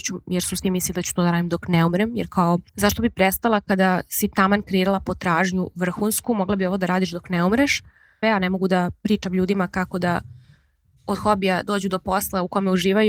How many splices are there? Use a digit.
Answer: 2